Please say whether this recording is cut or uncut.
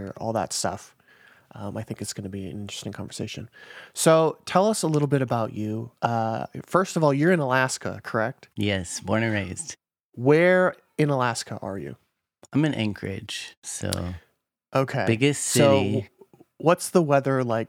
cut